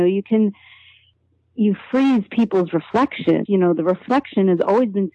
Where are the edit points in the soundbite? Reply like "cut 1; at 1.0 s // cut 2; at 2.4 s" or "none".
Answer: cut 1; at 3.5 s